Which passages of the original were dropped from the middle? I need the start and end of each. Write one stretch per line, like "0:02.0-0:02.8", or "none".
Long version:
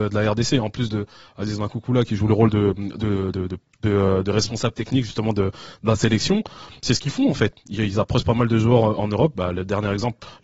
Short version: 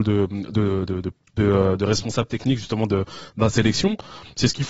none